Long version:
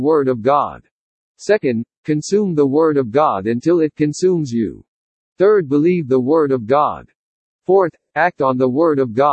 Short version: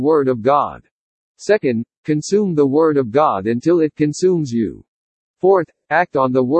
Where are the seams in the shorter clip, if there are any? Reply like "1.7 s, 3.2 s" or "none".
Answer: 5.2 s